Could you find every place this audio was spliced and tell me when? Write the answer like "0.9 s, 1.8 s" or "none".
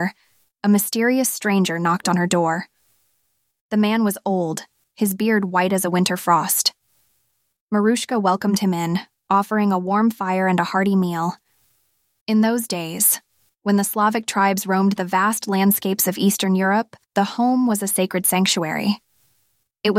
12.2 s, 17.0 s